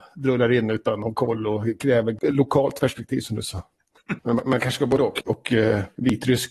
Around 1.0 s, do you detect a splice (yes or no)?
no